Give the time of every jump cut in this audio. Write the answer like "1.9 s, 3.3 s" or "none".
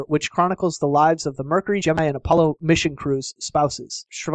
none